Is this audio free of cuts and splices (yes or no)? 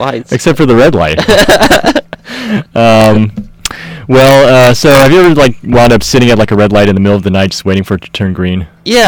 yes